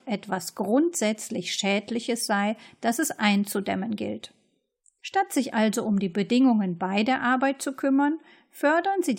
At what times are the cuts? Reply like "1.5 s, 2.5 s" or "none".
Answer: none